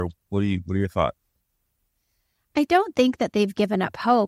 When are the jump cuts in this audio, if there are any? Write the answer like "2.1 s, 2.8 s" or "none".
none